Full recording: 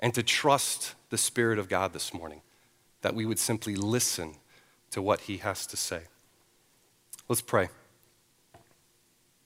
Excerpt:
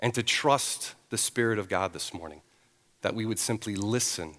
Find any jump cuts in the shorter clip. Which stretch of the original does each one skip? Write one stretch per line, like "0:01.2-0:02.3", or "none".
none